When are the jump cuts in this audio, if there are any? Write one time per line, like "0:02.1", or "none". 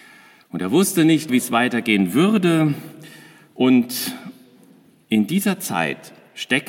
0:01.3